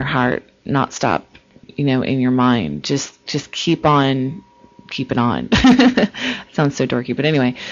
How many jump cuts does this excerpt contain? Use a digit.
0